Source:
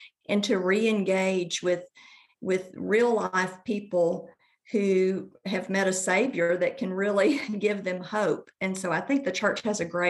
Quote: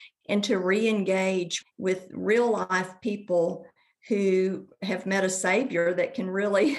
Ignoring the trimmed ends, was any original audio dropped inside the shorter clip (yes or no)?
yes